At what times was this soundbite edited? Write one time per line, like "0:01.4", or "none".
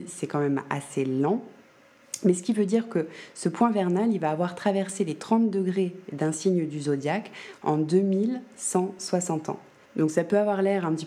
0:09.9